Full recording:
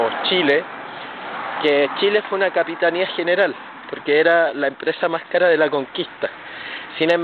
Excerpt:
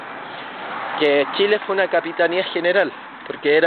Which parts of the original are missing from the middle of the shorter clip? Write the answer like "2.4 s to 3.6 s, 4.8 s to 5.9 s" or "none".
none